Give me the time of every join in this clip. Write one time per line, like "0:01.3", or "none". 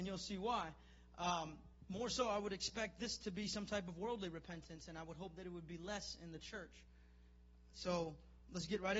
none